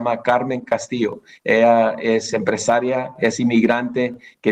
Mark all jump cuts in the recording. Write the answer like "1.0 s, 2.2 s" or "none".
none